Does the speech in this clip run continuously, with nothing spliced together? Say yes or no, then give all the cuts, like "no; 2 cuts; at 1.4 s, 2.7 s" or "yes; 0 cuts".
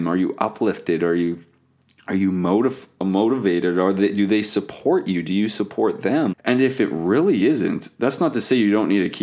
no; 1 cut; at 6.3 s